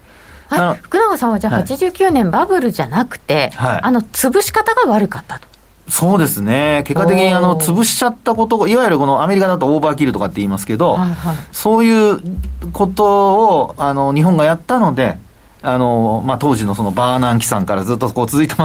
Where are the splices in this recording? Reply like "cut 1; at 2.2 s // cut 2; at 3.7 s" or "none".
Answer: none